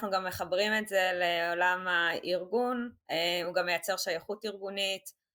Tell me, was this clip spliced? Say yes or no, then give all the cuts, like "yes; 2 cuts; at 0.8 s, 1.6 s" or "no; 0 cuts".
no; 0 cuts